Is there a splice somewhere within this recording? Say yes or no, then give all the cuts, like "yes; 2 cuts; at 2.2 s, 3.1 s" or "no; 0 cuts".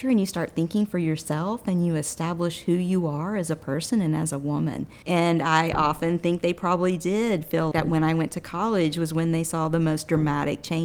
yes; 2 cuts; at 5.0 s, 7.7 s